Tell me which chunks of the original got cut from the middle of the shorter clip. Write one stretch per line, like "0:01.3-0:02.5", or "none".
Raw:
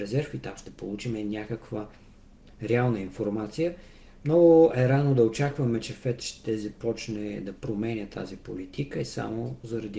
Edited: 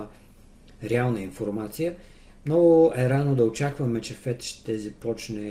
none

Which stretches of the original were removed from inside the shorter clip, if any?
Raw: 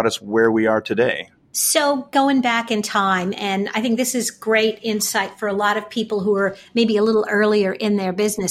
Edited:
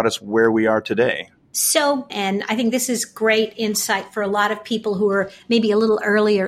0:02.1-0:03.4

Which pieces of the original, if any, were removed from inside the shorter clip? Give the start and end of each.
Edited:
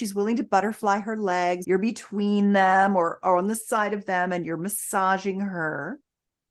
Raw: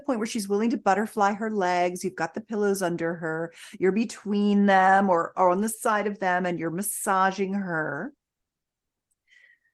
0:02.0-0:03.8

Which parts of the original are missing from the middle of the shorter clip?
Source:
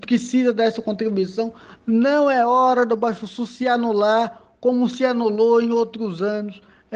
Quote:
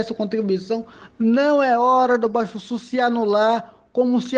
none

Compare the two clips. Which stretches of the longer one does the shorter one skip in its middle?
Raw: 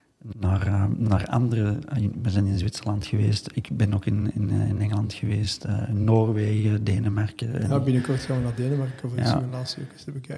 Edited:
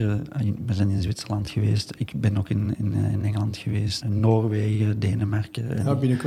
0:05.6-0:05.9

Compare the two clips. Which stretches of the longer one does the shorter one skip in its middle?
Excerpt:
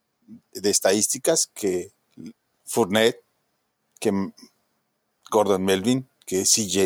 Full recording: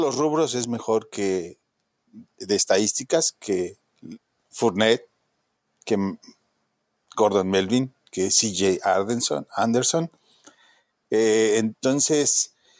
none

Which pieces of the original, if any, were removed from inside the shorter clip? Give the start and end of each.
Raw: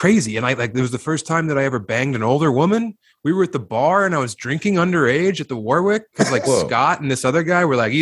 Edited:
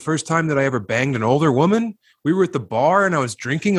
none

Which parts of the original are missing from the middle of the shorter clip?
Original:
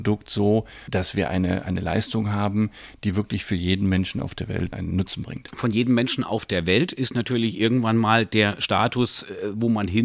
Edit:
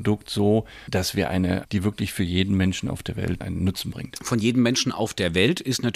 0:01.6-0:03.0

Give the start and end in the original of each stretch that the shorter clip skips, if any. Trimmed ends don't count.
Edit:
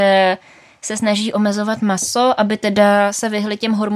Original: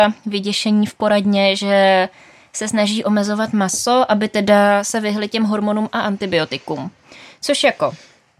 none

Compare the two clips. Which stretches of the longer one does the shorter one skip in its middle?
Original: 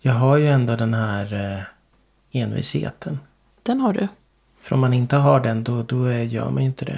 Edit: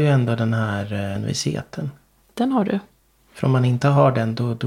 0:01.6-0:02.4

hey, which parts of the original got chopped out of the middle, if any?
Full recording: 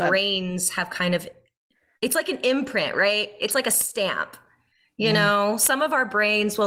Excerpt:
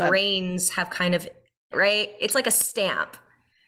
0:01.7-0:02.9

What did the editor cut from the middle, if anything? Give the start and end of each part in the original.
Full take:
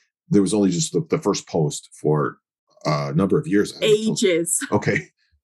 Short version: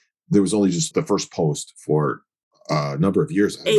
0:00.9-0:01.1

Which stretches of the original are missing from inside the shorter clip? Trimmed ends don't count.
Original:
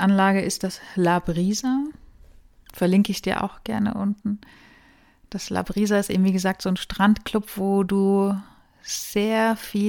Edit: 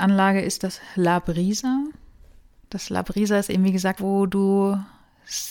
0:02.6-0:05.2
0:06.6-0:07.5

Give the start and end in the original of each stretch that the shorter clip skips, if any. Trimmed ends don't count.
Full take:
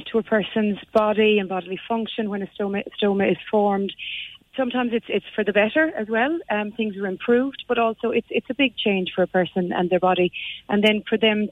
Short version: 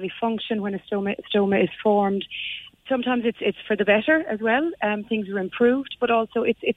none

